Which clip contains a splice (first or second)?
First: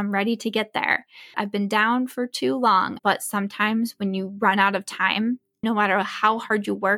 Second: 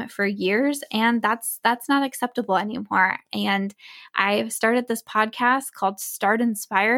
first